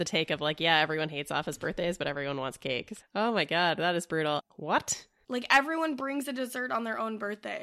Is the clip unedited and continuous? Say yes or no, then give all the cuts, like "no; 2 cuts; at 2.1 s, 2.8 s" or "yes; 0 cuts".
no; 2 cuts; at 3.0 s, 4.4 s